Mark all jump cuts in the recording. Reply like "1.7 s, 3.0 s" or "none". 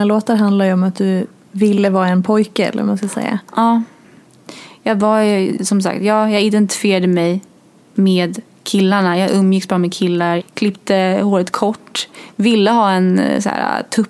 10.4 s